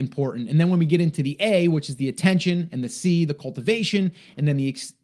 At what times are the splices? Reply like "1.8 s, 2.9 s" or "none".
none